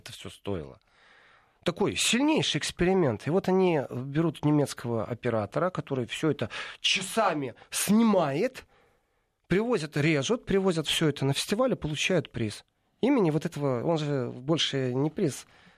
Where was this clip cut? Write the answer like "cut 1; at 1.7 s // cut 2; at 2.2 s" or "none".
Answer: none